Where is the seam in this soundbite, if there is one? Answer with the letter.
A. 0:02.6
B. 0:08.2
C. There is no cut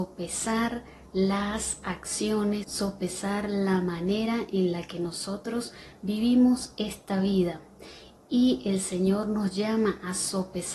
A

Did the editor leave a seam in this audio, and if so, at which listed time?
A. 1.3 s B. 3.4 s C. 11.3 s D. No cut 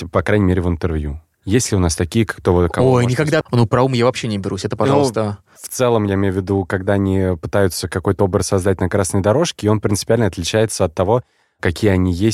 B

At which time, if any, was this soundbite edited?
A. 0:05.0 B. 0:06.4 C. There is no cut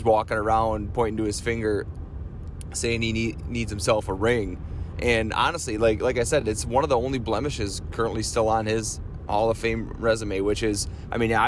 C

